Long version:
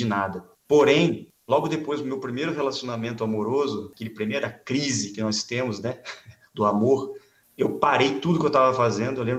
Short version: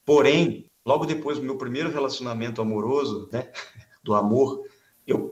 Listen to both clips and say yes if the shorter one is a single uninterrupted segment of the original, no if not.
no